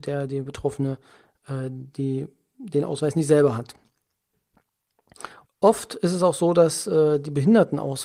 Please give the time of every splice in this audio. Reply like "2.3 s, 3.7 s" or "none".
5.5 s

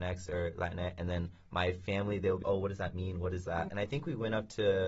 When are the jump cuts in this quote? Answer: 2.4 s, 3.7 s

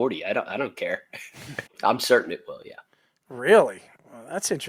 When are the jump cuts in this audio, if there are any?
1.7 s

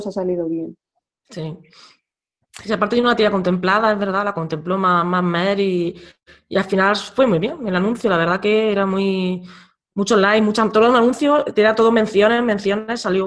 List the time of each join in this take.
none

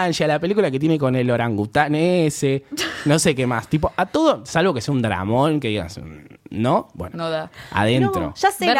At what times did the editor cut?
none

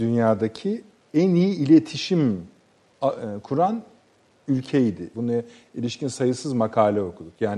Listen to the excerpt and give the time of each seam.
5.1 s

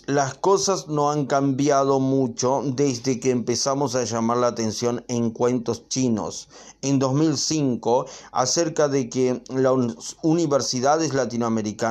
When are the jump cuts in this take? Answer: none

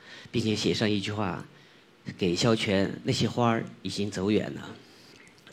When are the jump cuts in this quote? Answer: none

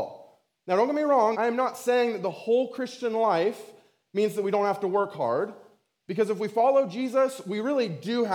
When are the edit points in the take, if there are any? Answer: 1.3 s

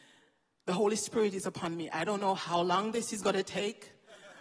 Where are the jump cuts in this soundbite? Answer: none

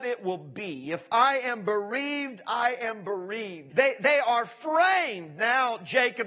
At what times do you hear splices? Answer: 3.7 s

